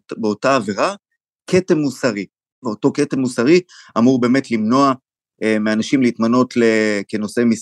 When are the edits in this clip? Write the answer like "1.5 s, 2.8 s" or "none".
none